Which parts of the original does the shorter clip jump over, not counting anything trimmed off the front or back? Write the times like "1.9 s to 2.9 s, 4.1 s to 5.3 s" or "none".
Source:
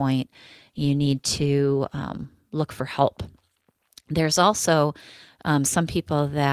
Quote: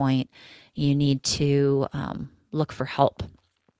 none